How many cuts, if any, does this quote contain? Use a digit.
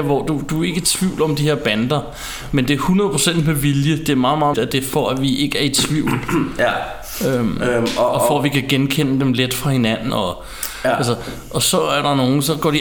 2